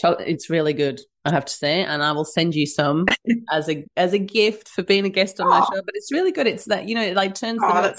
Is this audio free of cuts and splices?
yes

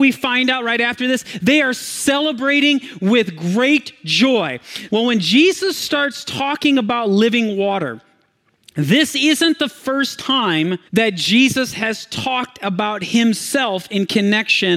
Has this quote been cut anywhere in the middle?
yes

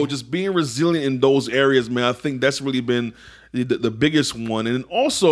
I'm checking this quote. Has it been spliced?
no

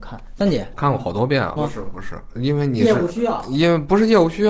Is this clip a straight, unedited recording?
no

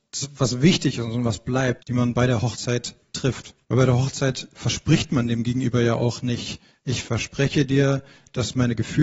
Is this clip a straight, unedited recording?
no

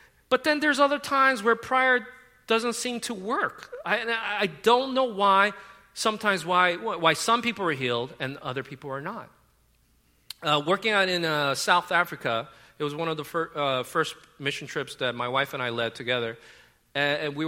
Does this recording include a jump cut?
no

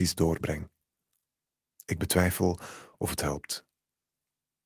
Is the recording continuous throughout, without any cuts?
yes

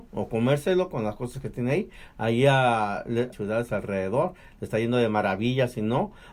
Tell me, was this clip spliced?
yes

